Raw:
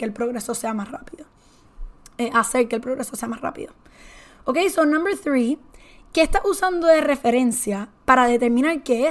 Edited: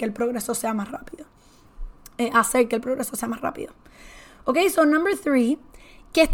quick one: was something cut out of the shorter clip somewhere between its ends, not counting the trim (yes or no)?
no